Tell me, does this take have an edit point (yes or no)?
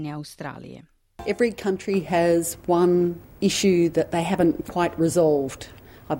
no